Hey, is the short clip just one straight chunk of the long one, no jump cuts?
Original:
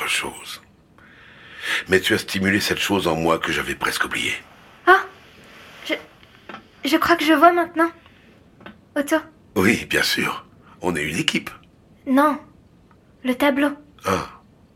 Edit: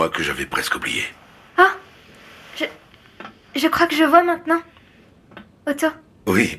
yes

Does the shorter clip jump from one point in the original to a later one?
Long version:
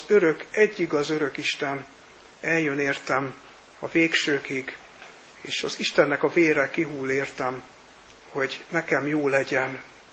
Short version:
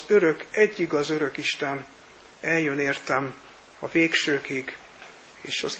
no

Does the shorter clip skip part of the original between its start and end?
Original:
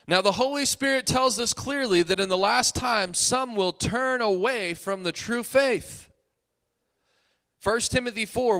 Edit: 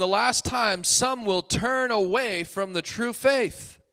no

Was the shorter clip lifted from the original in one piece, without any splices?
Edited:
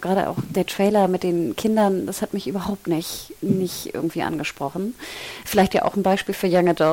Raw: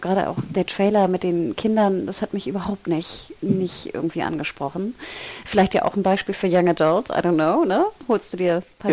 yes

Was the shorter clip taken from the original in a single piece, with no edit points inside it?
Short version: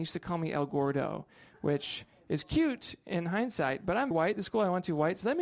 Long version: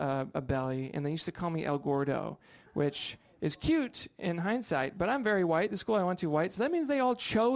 no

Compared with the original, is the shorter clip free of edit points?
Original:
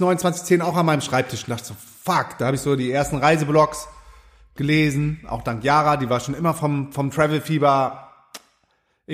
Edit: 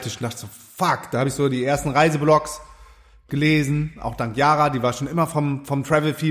yes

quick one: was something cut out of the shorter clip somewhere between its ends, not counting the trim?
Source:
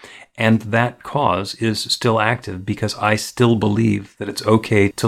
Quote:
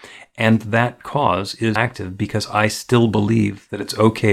yes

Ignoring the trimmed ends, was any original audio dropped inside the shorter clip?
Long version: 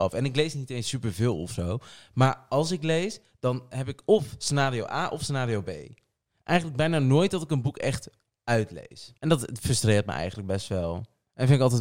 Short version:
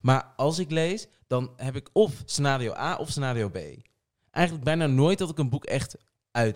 no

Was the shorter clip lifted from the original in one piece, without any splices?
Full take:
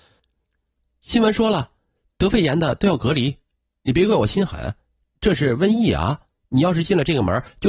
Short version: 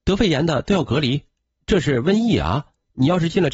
no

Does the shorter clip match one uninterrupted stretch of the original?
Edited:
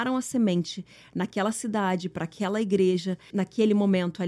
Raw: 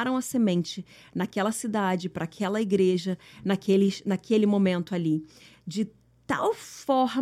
no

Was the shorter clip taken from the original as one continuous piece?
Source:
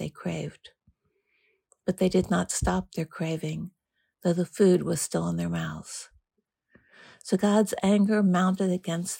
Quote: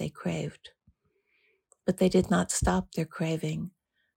yes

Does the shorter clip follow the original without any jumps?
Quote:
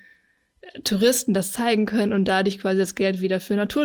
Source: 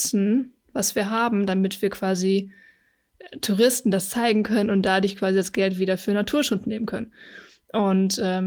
yes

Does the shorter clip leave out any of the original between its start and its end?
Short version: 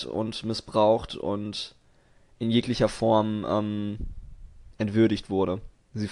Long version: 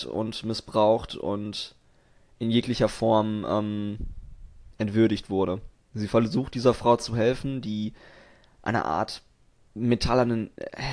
no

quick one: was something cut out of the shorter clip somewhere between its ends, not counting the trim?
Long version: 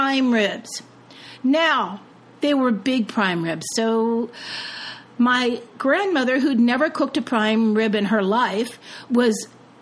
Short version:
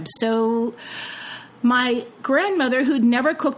no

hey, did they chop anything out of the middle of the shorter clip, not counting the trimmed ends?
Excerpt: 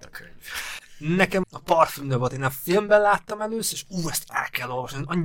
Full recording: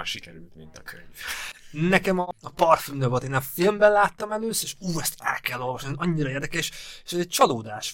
yes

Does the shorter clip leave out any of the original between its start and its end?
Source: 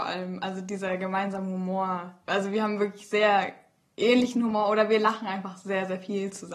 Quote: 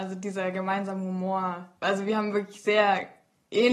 no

